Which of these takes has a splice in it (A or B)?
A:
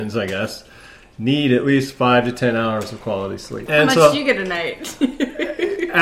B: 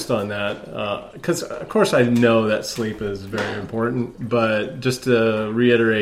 A